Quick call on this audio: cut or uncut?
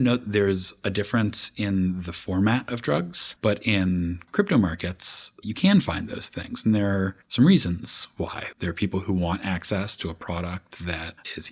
cut